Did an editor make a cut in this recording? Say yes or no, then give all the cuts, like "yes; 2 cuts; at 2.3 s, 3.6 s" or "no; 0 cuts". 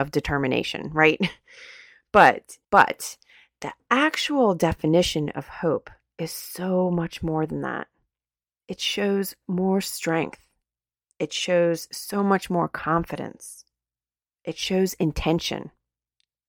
yes; 1 cut; at 2.6 s